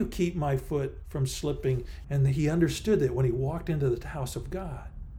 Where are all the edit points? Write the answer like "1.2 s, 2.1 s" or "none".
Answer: 2.0 s